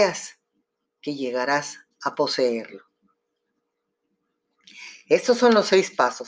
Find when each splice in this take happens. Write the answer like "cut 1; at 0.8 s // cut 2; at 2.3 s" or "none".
none